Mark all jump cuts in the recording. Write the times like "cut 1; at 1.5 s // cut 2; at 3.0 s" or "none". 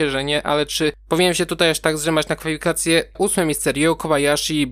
cut 1; at 3.2 s